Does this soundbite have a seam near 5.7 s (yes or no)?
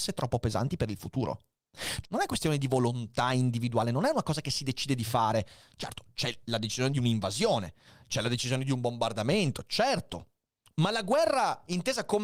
no